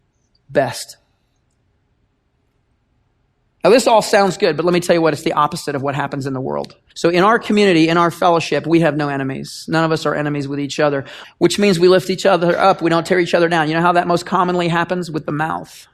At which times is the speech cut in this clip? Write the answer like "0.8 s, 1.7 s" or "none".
6.9 s, 11.2 s